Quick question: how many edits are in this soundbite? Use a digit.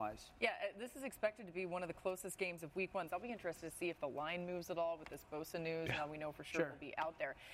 1